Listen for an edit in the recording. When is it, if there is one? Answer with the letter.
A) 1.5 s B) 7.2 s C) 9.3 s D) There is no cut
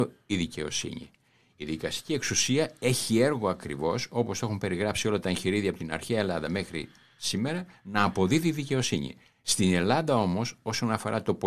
D